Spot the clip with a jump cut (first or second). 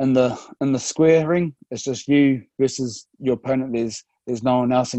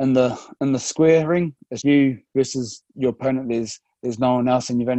second